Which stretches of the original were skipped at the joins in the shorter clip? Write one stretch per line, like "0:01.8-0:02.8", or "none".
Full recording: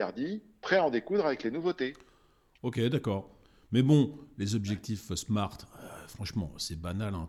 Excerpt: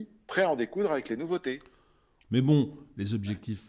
0:02.6-0:03.6